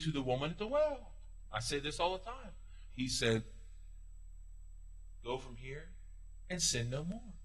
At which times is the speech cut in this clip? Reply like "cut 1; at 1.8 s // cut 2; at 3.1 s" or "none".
cut 1; at 2.9 s